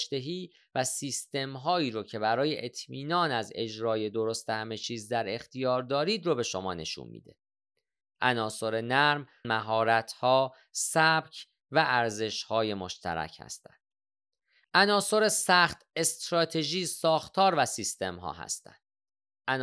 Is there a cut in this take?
yes; 2 cuts; at 9.4 s, 14.6 s

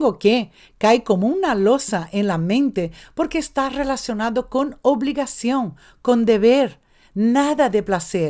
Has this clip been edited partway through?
no; 0 cuts

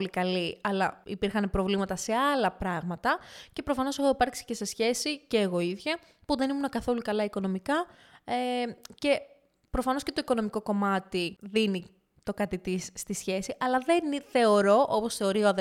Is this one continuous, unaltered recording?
yes; 0 cuts

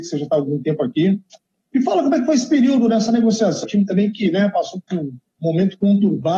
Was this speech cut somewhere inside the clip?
yes; 1 cut; at 3.6 s

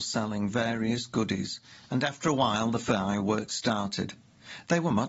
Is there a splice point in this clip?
no; 0 cuts

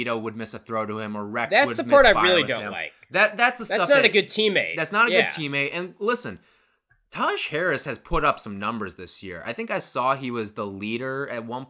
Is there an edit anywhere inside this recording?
no; 0 cuts

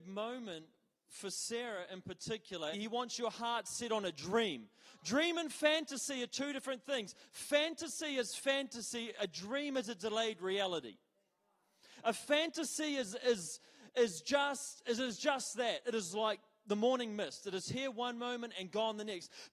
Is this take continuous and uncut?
no; 1 cut; at 2.7 s

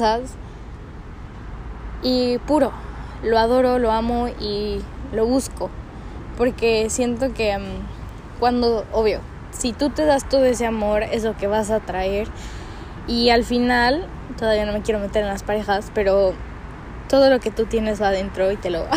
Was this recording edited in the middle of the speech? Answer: no; 0 cuts

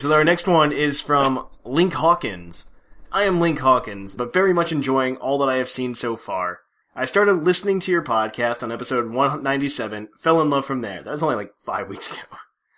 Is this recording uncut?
no; 3 cuts; at 3.1 s, 4.2 s, 6.8 s

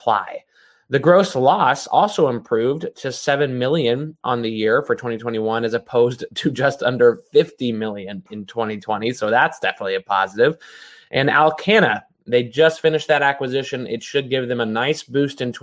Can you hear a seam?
no; 0 cuts

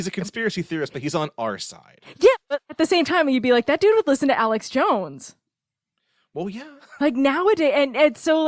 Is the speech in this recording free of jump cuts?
yes; 0 cuts

